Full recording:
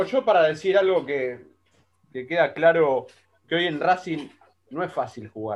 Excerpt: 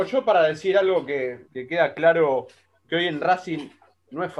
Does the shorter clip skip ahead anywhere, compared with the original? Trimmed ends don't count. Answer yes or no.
yes